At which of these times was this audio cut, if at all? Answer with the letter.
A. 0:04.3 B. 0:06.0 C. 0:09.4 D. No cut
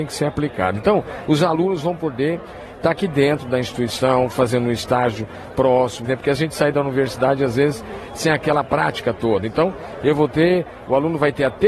B